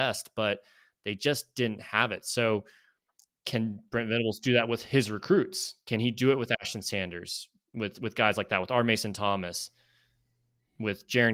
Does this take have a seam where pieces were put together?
no; 0 cuts

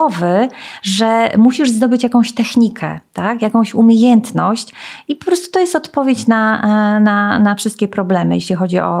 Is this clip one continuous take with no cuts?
yes; 0 cuts

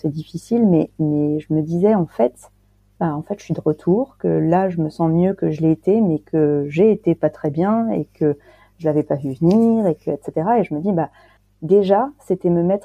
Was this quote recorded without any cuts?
no; 1 cut; at 3.0 s

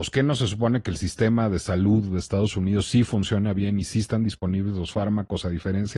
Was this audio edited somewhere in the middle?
no; 0 cuts

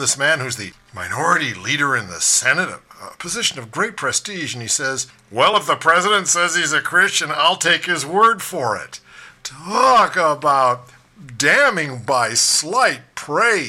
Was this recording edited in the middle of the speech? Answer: no; 0 cuts

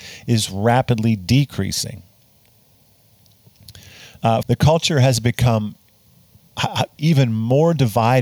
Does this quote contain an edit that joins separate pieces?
yes; 2 cuts; at 4.4 s, 7.0 s

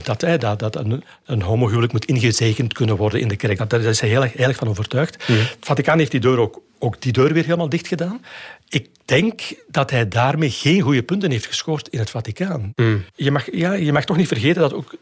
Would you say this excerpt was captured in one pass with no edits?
yes; 0 cuts

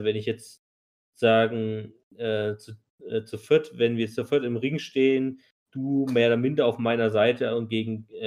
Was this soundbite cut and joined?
no; 0 cuts

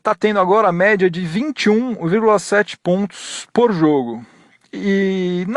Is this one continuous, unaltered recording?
yes; 0 cuts

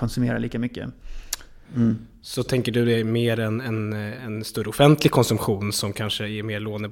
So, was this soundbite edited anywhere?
yes; 2 cuts; at 1.6 s, 4.2 s

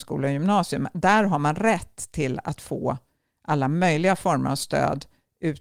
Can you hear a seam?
no; 0 cuts

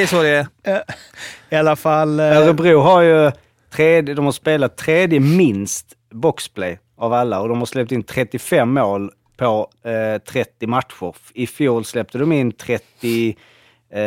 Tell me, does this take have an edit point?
no; 0 cuts

